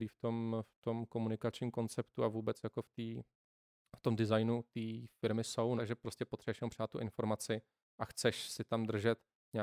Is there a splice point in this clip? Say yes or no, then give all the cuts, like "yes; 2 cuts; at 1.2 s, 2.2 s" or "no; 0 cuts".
yes; 1 cut; at 5.8 s